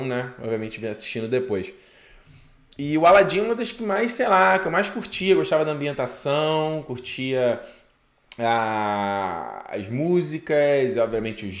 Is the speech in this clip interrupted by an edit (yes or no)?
no